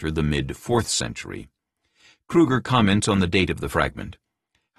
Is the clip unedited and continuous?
yes; 0 cuts

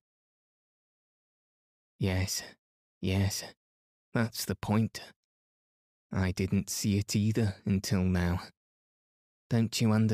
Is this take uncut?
yes; 0 cuts

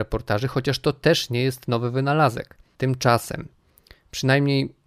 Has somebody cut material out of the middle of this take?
yes; 1 cut; at 2.7 s

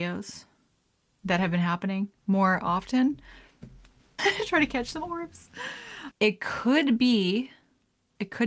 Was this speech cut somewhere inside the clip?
yes; 2 cuts; at 4.2 s, 6.1 s

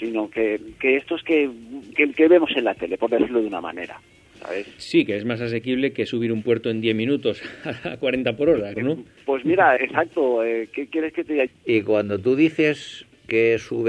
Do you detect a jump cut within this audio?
yes; 3 cuts; at 8.8 s, 9.8 s, 11.5 s

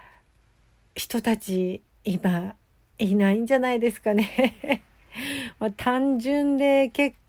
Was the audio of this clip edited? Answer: no; 0 cuts

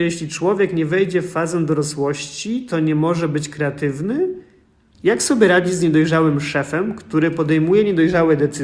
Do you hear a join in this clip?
yes; 1 cut; at 4.9 s

